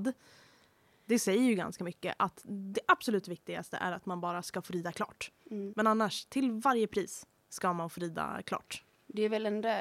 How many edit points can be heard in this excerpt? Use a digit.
1